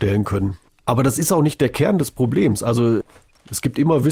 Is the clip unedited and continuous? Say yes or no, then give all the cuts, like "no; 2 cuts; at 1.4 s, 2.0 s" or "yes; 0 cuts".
yes; 0 cuts